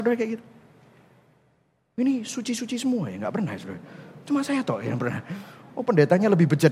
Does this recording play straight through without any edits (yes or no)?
yes